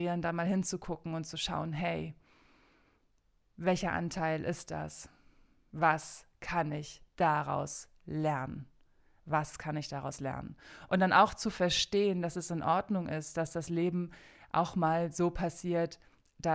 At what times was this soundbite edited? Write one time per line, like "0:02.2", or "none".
none